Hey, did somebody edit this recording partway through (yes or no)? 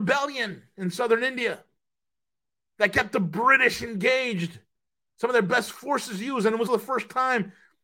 yes